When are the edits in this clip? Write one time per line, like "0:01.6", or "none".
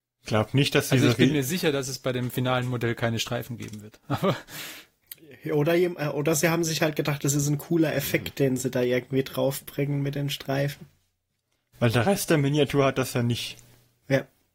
none